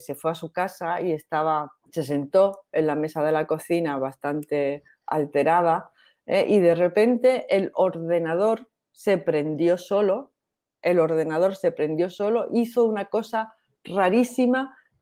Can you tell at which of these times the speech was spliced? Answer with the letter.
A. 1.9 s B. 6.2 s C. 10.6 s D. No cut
A